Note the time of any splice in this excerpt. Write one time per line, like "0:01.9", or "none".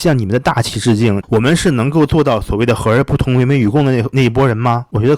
0:01.2